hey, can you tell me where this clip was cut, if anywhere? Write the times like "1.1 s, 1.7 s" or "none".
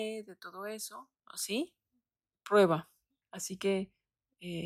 1.2 s, 3.2 s